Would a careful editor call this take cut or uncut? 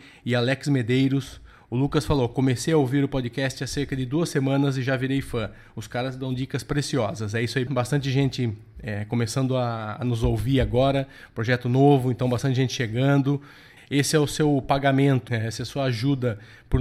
cut